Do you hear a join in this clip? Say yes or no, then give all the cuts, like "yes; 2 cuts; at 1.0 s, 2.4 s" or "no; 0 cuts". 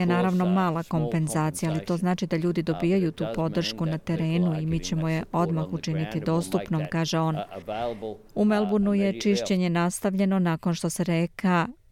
no; 0 cuts